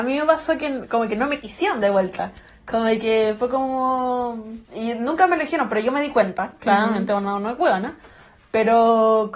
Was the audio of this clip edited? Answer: yes; 1 cut; at 4.6 s

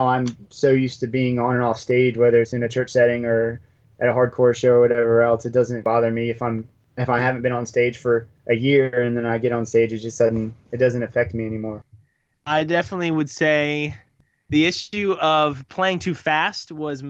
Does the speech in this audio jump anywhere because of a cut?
no; 0 cuts

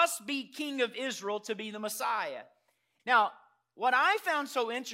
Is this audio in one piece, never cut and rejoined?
no; 1 cut; at 3.0 s

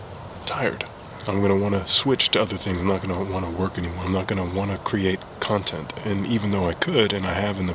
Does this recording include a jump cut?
no; 0 cuts

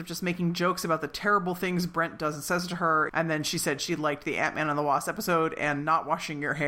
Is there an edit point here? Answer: yes; 1 cut; at 3.1 s

